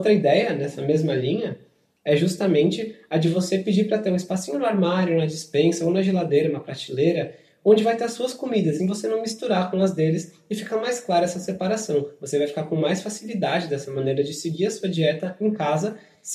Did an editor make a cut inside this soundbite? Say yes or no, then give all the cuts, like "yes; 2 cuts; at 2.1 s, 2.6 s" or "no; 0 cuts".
yes; 1 cut; at 8.8 s